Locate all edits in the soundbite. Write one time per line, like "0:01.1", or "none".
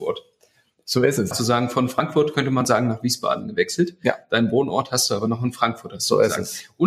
0:01.3